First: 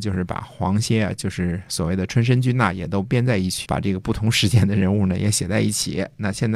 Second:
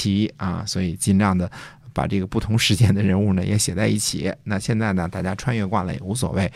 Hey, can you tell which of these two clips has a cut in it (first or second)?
first